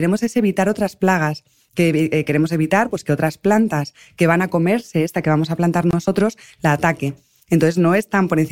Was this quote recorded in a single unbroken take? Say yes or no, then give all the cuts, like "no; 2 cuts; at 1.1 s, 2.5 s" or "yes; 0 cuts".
yes; 0 cuts